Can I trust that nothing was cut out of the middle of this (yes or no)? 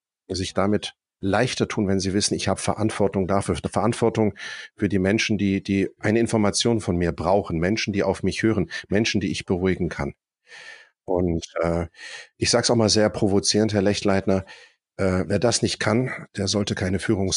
yes